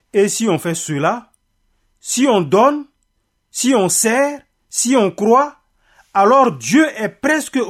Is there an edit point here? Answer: no; 0 cuts

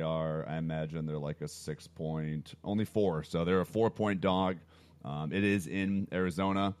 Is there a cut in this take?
no; 0 cuts

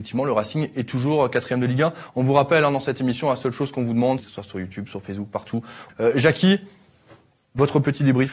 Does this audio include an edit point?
yes; 2 cuts; at 4.2 s, 5.9 s

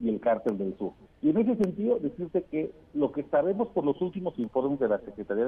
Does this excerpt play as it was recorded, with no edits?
no; 1 cut; at 1.1 s

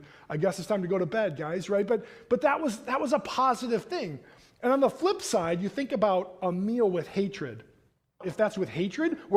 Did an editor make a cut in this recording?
yes; 1 cut; at 8.2 s

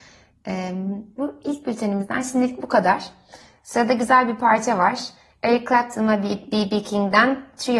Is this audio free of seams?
yes; 0 cuts

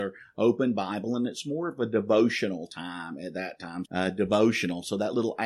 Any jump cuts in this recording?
yes; 1 cut; at 3.8 s

